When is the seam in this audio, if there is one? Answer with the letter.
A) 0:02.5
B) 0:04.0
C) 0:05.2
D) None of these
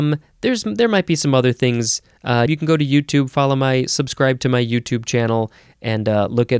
A